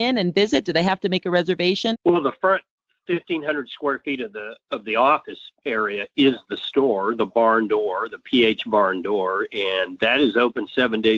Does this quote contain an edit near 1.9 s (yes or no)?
yes